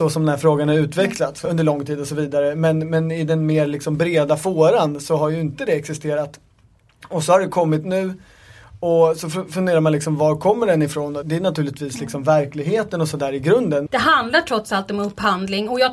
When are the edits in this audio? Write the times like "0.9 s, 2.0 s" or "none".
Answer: 1.5 s, 11.2 s, 13.9 s